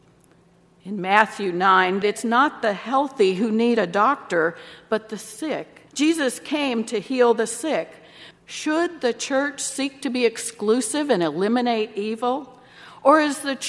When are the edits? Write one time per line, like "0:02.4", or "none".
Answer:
0:02.0
0:05.9
0:08.3